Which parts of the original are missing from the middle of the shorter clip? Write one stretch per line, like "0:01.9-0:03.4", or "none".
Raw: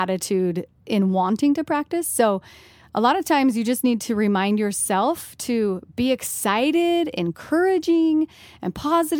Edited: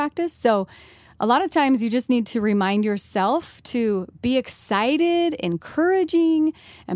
none